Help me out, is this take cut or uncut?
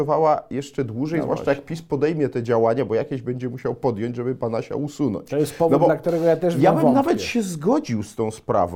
uncut